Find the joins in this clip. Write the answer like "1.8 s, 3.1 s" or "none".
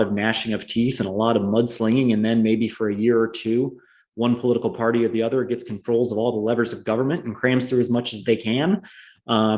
none